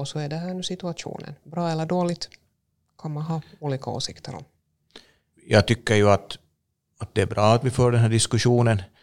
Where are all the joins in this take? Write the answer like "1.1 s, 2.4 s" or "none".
5.3 s